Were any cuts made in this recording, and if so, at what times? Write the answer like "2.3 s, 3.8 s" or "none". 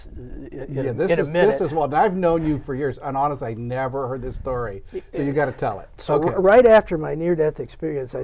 6.0 s